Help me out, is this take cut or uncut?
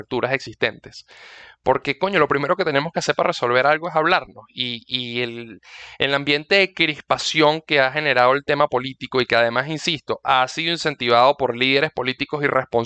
uncut